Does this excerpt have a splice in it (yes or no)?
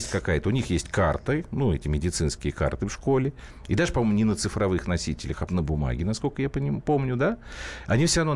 yes